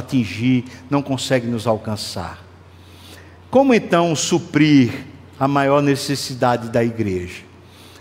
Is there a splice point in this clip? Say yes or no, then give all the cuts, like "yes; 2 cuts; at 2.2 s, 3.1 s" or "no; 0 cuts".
no; 0 cuts